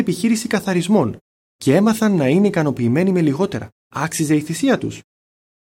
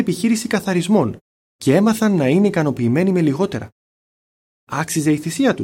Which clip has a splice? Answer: first; 1 cut; at 3.8 s

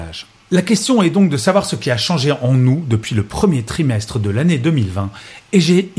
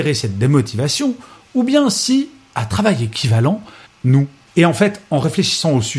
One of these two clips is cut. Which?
second; 1 cut; at 3.9 s

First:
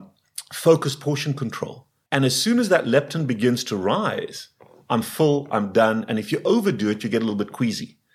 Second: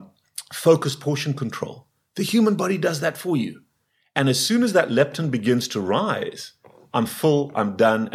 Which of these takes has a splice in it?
first; 1 cut; at 2.1 s

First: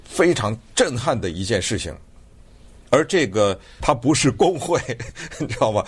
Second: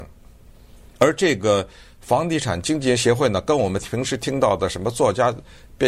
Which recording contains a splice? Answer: first; 1 cut; at 3.8 s

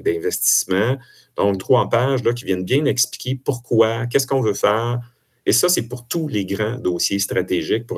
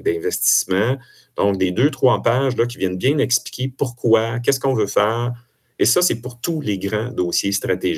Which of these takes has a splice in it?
first; 1 cut; at 1.6 s

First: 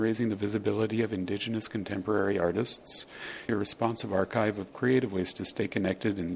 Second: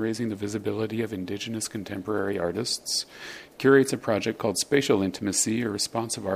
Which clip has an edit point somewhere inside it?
first; 1 cut; at 3.5 s

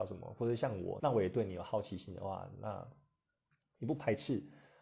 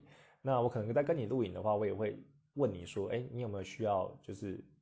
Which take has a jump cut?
first; 1 cut; at 1.0 s

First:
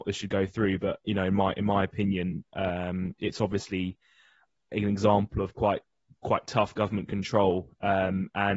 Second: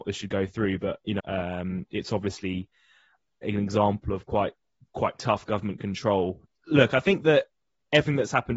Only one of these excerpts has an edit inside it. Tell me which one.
second; 2 cuts; at 1.2 s, 6.5 s

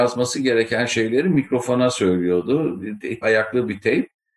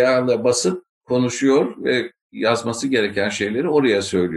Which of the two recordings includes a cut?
first; 1 cut; at 3.2 s

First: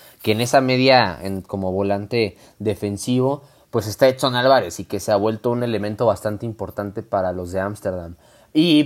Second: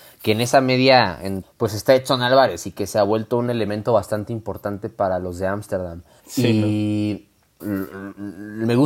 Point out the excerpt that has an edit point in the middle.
second; 3 cuts; at 1.4 s, 6.2 s, 7.6 s

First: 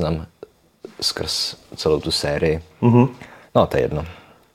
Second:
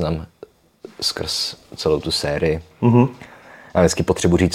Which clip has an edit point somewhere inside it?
first; 1 cut; at 3.4 s

